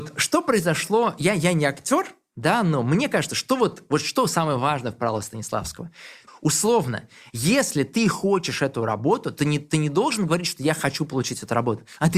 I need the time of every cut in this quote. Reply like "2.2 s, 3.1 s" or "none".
6.3 s